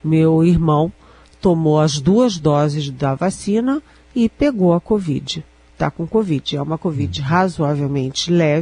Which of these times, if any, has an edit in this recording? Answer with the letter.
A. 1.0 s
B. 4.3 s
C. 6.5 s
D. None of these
D